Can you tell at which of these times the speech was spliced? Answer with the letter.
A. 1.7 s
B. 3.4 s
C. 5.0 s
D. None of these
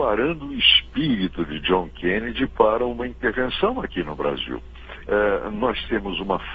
C